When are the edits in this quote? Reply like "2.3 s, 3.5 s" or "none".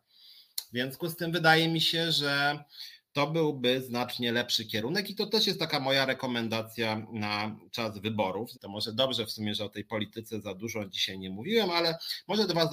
8.5 s

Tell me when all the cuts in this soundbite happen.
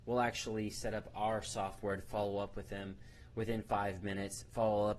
none

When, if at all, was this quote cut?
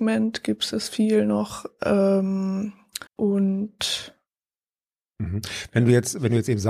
3.1 s

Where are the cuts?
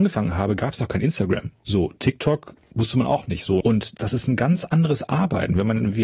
3.6 s

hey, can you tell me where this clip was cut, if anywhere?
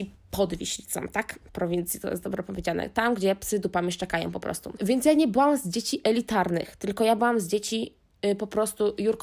4.8 s

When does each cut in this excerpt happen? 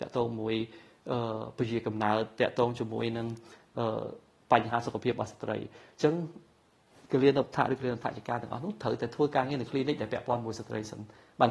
none

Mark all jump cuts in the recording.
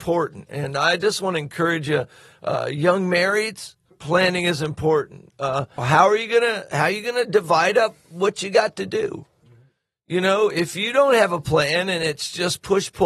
5.8 s

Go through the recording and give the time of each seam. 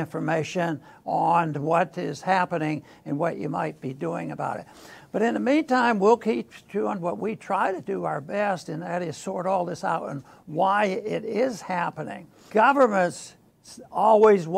12.5 s

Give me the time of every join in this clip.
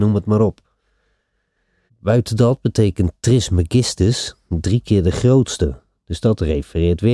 1.9 s

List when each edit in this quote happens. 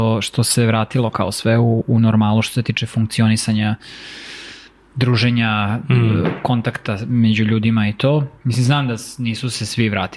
none

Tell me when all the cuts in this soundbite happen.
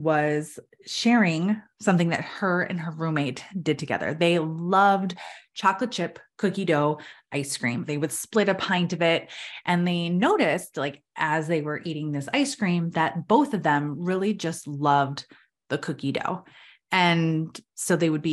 7.9 s

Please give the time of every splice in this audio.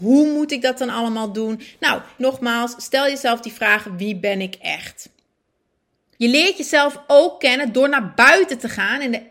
2.2 s, 6.1 s

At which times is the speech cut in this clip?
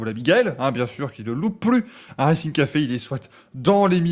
none

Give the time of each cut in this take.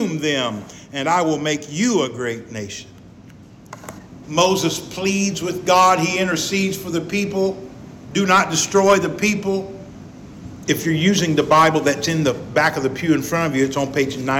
4.2 s, 10.7 s

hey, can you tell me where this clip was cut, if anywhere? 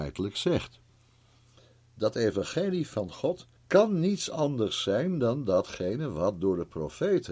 3.6 s

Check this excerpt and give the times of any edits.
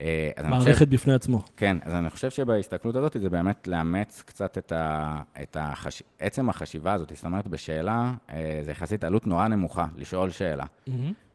none

